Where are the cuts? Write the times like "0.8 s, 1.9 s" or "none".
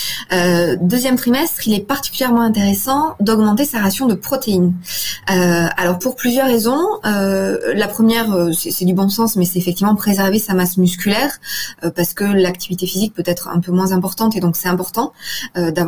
6.0 s